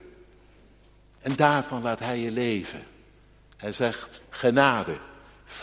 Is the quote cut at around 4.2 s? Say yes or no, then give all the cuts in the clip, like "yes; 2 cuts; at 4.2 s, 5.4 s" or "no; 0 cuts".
yes; 1 cut; at 4.2 s